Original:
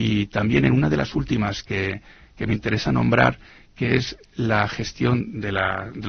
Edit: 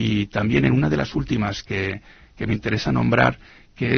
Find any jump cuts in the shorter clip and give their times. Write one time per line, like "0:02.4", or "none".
none